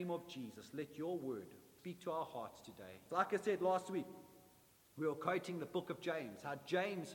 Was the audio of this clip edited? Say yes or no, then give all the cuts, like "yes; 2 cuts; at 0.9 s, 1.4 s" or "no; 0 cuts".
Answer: yes; 2 cuts; at 1.8 s, 3.1 s